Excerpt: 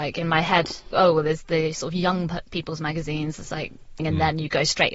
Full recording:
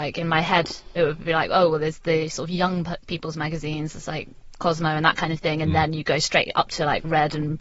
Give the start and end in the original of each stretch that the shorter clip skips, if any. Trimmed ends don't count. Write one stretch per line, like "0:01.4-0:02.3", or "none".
0:00.9-0:01.5
0:04.6-0:05.5